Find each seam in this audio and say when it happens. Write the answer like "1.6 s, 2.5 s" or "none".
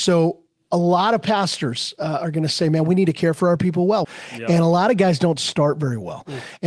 4.0 s